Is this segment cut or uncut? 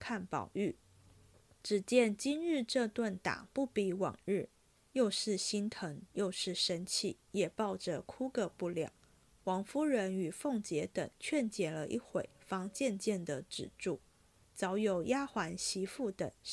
uncut